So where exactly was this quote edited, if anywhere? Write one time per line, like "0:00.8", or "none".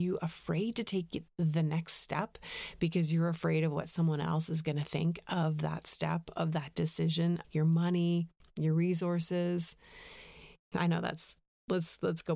0:07.4
0:10.7